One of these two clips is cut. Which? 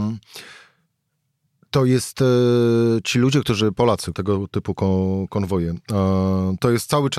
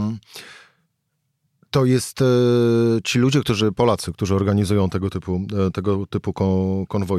first; 1 cut; at 4.1 s

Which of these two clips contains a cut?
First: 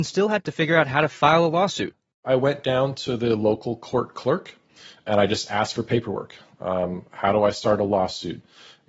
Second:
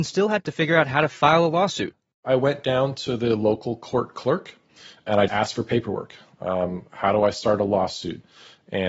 second; 1 cut; at 5.3 s

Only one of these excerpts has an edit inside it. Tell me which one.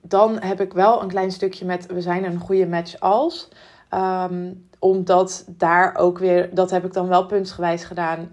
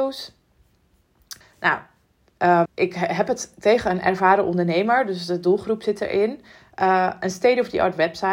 second; 2 cuts; at 1.4 s, 2.7 s

